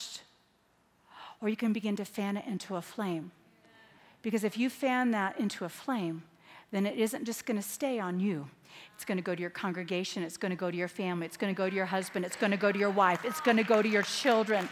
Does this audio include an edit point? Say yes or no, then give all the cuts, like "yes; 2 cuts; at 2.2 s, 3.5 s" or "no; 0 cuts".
no; 0 cuts